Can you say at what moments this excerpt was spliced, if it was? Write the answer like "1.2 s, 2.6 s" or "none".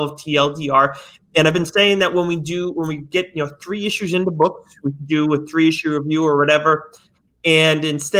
none